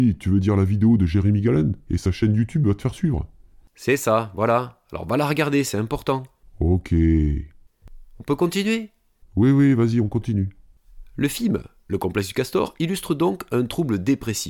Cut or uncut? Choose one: uncut